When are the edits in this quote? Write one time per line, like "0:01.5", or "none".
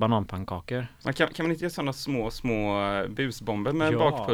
none

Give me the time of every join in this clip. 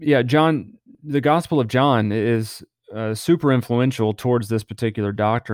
none

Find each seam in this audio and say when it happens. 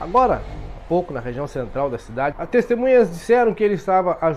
0:02.3

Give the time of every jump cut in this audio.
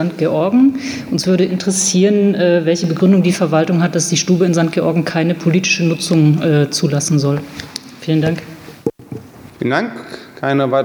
none

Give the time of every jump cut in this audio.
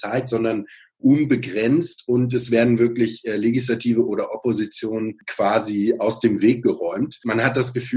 none

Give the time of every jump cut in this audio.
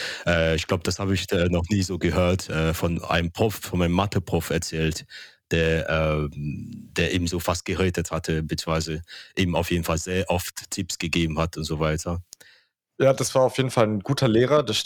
none

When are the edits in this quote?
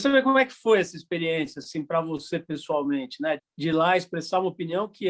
0:03.4

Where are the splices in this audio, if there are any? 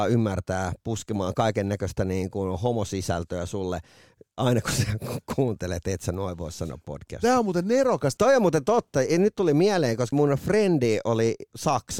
0:08.2
0:10.1

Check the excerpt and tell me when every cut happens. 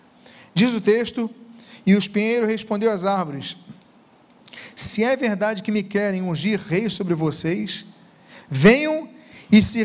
none

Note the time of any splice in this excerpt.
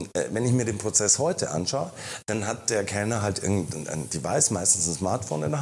none

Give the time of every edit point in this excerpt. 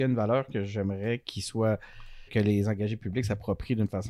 0:02.3

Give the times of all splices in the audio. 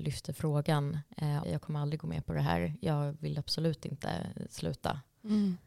0:01.4

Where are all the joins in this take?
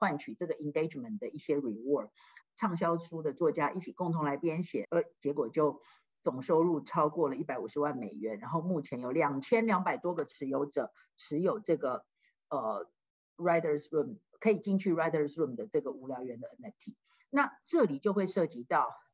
0:02.4
0:04.8

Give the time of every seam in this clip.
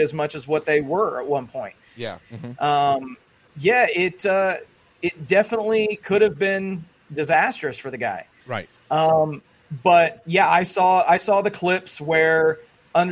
0:02.2
0:08.4

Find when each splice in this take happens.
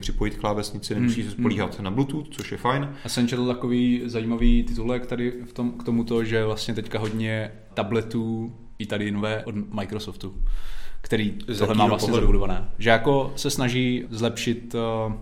0:07.7
0:09.4
0:14.1

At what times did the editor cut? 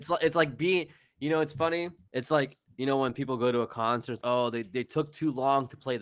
0:02.1
0:04.2

